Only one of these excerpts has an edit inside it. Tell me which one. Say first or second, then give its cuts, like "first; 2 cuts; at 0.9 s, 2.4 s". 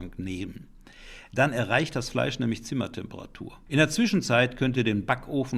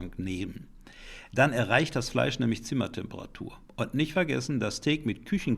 first; 1 cut; at 3.7 s